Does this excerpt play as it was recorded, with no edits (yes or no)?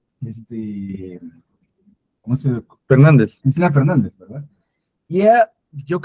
yes